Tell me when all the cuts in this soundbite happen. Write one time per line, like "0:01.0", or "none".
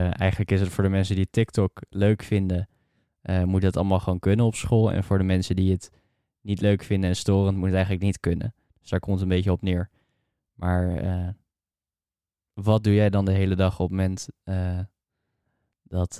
none